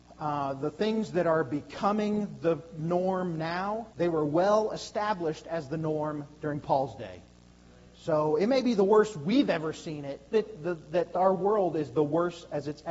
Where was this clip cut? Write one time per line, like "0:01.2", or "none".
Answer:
0:03.9
0:10.3